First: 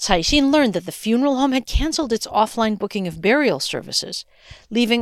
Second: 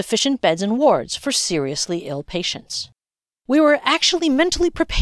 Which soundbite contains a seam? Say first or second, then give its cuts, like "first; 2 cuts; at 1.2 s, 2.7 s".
second; 1 cut; at 3.4 s